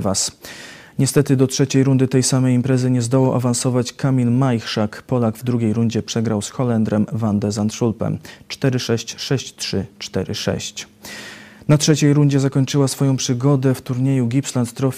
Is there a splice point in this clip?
no; 0 cuts

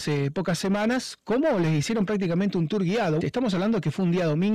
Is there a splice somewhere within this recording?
yes; 1 cut; at 3.2 s

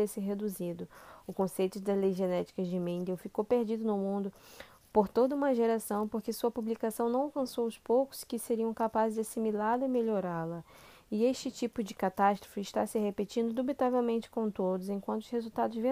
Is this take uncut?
yes; 0 cuts

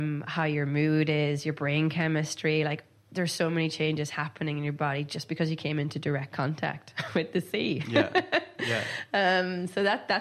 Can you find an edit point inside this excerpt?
no; 0 cuts

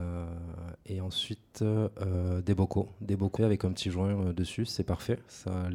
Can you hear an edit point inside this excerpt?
yes; 1 cut; at 3.4 s

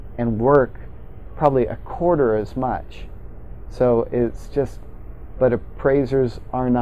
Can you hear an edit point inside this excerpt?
yes; 1 cut; at 5.3 s

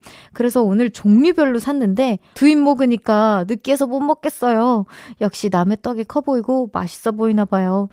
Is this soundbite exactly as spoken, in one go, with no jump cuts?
no; 1 cut; at 2.3 s

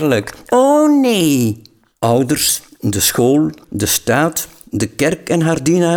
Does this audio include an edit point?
yes; 1 cut; at 3.6 s

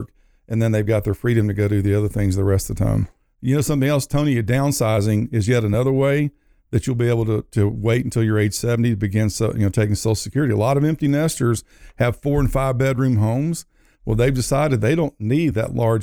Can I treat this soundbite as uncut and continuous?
yes; 0 cuts

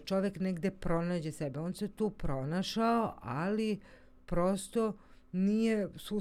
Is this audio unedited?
yes; 0 cuts

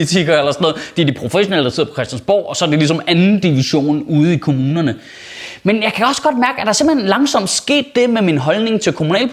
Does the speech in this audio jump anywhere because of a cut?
no; 0 cuts

